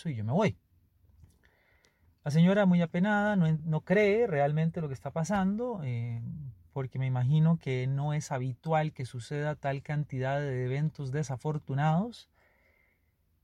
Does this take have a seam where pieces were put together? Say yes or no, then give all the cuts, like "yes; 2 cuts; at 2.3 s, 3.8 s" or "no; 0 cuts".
no; 0 cuts